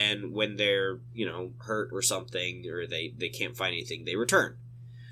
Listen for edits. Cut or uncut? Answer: uncut